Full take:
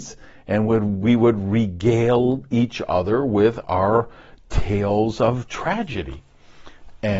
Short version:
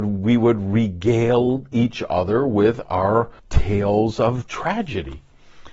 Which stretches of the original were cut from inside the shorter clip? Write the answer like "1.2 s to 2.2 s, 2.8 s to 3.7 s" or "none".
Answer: 4.2 s to 4.4 s